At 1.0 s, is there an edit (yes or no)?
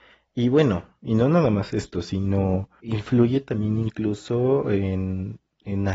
no